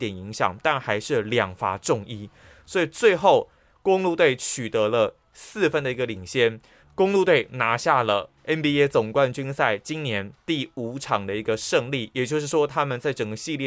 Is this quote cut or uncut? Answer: cut